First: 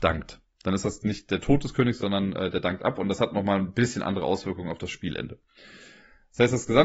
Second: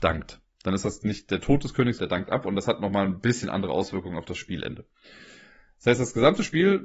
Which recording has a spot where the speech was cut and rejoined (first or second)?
second